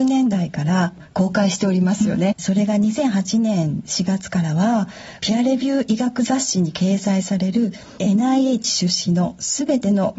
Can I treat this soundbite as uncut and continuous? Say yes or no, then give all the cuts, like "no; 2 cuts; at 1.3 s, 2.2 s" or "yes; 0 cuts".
no; 2 cuts; at 2.3 s, 5.2 s